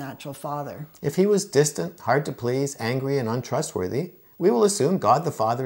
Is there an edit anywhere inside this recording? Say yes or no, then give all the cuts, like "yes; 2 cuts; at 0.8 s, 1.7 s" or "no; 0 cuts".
no; 0 cuts